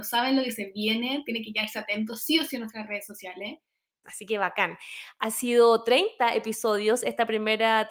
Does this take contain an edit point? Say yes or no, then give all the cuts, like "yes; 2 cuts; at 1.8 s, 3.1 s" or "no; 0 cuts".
yes; 1 cut; at 4.0 s